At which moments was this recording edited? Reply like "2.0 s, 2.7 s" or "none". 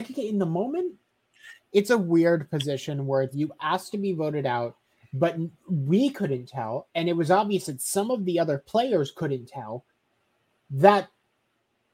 1.6 s, 3.3 s